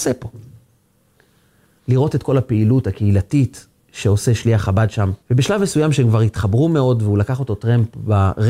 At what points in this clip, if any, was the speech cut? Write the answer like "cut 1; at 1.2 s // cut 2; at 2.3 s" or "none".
cut 1; at 1.8 s // cut 2; at 5.2 s